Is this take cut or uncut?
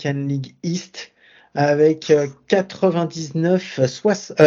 uncut